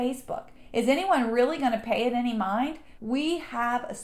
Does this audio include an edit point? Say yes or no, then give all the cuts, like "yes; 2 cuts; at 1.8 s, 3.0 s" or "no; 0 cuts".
yes; 1 cut; at 3.0 s